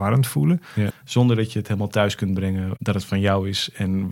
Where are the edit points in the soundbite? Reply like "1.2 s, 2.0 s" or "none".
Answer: 0.9 s